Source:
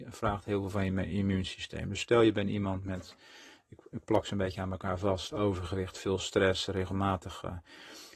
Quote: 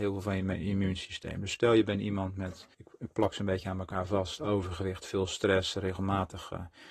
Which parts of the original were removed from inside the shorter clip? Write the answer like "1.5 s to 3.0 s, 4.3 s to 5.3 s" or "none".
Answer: 3.2 s to 3.6 s

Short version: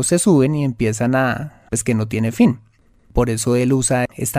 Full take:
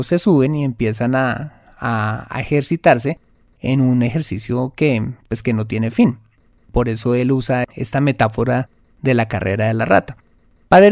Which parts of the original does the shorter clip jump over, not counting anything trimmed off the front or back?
1.7 s to 5.3 s

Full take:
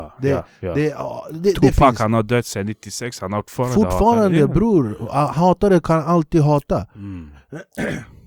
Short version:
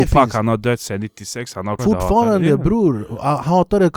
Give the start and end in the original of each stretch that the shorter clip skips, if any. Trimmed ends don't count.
3.4 s to 3.7 s

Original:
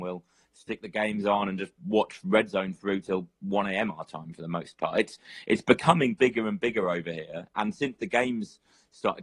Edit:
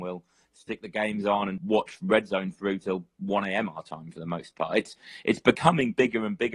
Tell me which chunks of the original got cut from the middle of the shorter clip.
1.6 s to 1.8 s

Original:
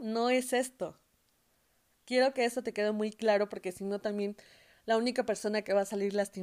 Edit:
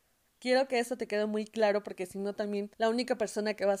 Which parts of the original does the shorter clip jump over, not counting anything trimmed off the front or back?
4.4 s to 4.8 s

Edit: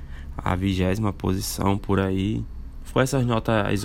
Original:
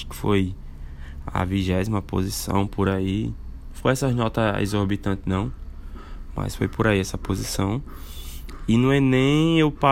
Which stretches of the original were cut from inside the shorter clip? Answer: none

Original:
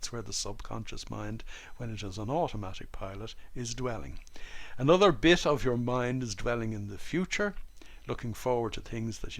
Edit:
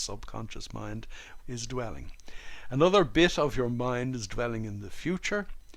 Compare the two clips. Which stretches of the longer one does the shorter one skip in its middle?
1.8 s to 3.5 s

